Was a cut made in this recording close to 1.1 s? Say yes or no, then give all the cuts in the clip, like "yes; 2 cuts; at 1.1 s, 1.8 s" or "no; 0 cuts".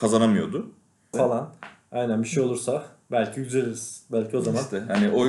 yes; 1 cut; at 1.1 s